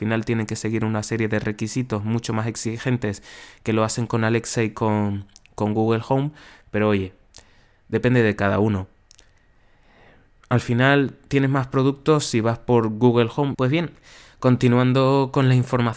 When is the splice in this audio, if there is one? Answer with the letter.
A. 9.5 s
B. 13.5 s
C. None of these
B